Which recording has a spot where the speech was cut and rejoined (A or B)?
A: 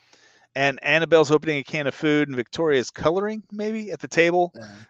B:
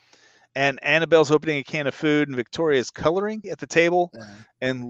B